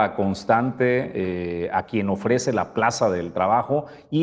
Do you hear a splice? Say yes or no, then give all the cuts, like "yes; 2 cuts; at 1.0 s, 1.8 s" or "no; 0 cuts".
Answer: no; 0 cuts